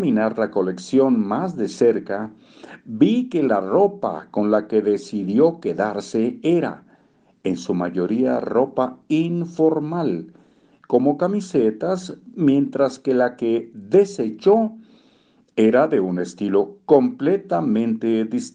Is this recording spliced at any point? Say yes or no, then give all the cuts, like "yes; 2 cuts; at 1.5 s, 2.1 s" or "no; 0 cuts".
no; 0 cuts